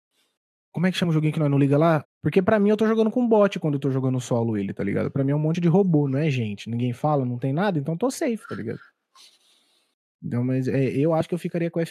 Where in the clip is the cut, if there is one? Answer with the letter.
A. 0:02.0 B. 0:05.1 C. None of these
A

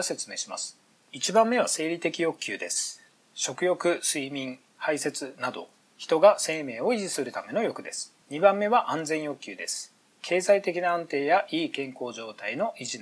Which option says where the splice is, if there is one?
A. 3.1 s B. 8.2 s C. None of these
B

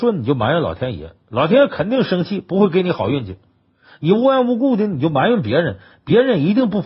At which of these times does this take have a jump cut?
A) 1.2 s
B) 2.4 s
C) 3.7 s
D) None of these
D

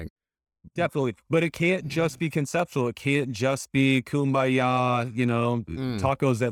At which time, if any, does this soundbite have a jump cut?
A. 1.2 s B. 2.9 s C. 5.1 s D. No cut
D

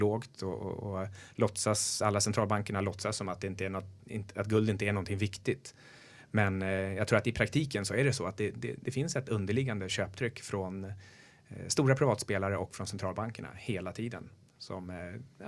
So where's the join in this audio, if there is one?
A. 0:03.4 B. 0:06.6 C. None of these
C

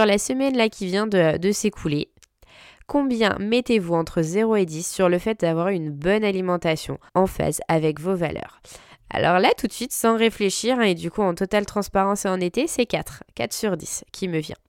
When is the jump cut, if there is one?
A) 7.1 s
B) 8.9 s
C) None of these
A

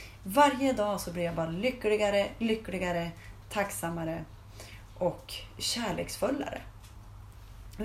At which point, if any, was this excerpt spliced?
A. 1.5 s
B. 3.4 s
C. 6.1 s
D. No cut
B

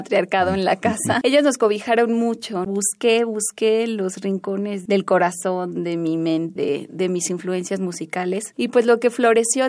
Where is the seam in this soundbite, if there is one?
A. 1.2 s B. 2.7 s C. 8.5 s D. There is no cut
B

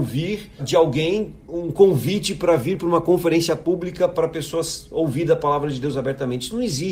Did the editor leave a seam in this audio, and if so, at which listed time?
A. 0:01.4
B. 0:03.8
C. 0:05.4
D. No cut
D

